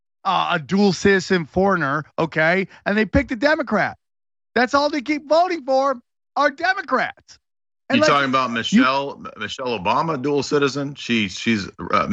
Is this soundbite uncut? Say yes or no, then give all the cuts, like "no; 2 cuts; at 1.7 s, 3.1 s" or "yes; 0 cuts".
yes; 0 cuts